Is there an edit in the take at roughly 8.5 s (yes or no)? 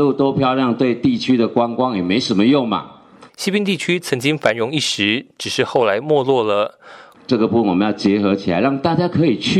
no